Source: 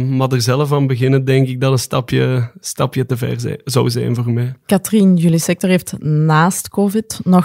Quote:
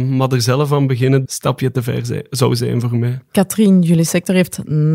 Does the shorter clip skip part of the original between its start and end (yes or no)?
yes